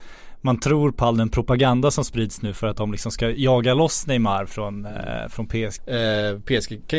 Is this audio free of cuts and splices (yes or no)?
no